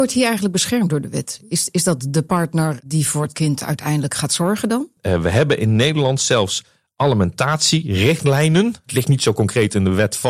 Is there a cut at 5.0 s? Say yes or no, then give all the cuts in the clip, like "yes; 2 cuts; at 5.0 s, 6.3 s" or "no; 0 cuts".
yes; 1 cut; at 5.0 s